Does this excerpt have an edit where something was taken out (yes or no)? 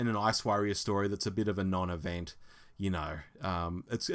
no